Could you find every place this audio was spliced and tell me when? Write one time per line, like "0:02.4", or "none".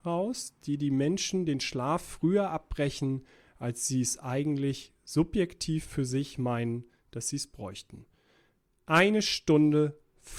none

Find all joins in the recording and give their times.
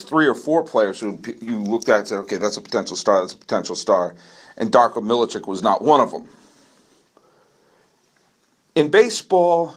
none

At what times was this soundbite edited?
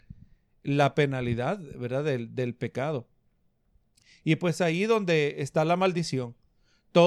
none

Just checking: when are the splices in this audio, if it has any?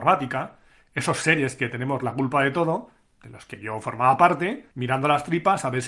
0:04.7

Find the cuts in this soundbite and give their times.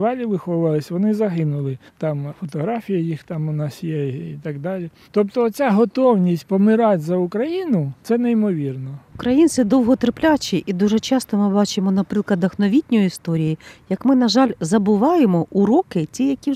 0:09.1

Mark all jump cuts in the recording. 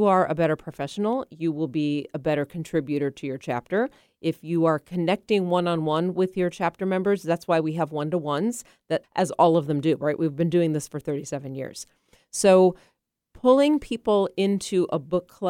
0:09.0

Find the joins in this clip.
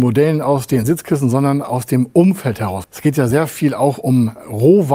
0:02.8

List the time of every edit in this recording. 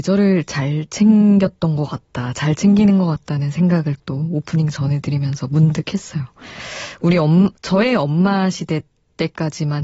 0:07.6

